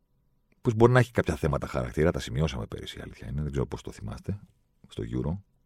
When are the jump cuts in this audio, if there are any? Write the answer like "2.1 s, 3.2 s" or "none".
none